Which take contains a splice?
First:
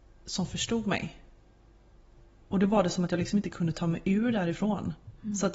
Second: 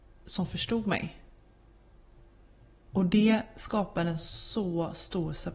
first; 1 cut; at 2.4 s

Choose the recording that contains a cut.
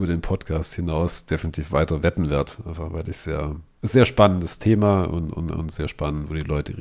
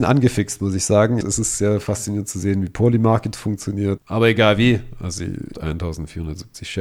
second; 3 cuts; at 1.2 s, 4.0 s, 5.5 s

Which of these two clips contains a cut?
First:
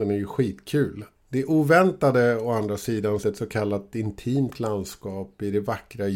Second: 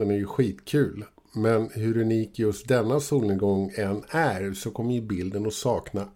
first; 2 cuts; at 1.1 s, 3.2 s

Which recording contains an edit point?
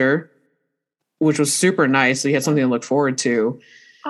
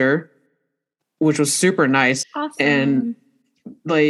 second; 1 cut; at 2.2 s

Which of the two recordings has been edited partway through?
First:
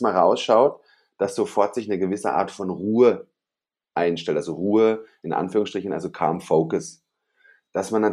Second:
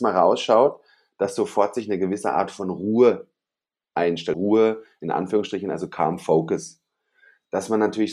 second; 1 cut; at 4.3 s

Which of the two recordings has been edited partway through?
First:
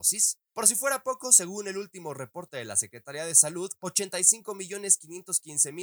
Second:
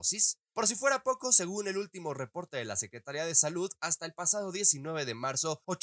first; 1 cut; at 3.8 s

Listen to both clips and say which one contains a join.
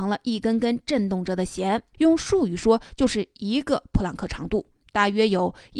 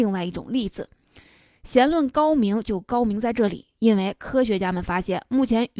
first; 1 cut; at 1.9 s

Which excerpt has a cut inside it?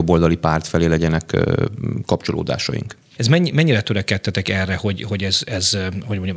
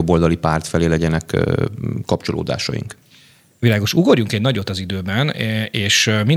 first; 1 cut; at 3.2 s

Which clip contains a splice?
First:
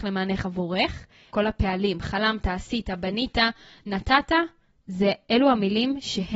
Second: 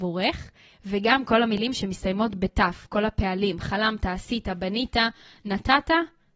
first; 1 cut; at 1.3 s

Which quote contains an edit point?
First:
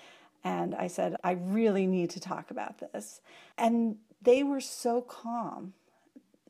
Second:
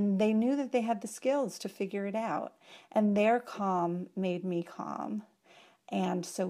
first; 2 cuts; at 1.2 s, 3.5 s

